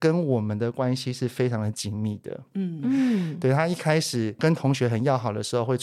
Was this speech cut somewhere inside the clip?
no; 0 cuts

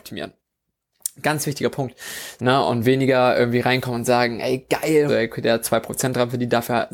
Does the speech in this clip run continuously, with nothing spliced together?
no; 3 cuts; at 1.2 s, 2.4 s, 5.1 s

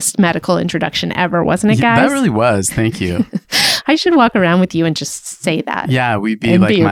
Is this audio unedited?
yes; 0 cuts

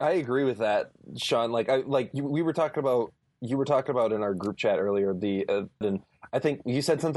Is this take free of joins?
no; 1 cut; at 5.8 s

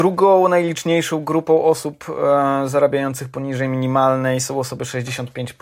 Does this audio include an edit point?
no; 0 cuts

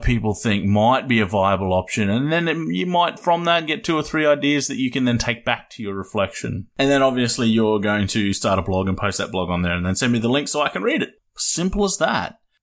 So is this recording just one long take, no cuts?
no; 1 cut; at 11.2 s

